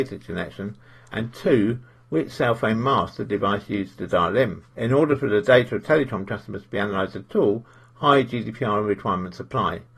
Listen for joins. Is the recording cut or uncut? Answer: cut